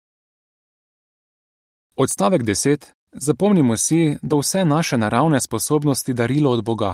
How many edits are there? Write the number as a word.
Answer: two